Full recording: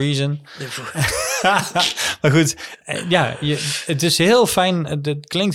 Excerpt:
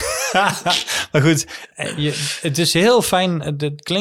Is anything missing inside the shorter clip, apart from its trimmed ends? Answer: yes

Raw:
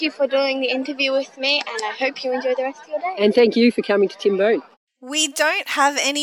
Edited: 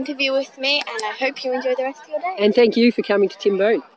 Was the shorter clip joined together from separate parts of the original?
no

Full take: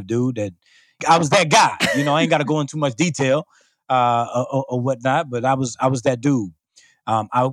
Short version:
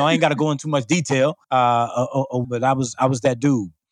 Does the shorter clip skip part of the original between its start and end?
yes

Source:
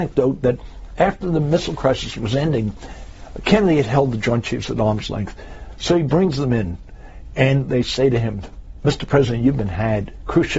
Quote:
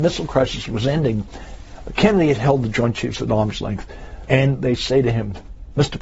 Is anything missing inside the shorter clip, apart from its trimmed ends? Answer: yes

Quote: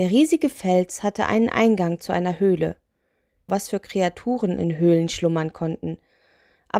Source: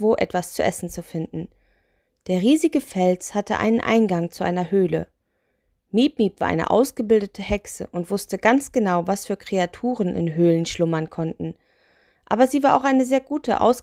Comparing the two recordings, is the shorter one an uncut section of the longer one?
no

